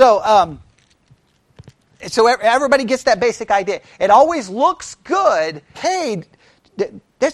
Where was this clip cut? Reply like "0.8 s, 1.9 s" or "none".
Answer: 5.7 s